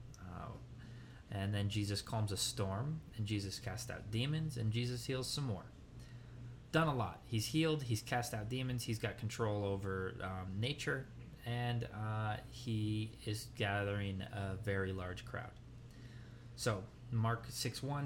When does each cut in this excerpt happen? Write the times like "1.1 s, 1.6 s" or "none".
6.7 s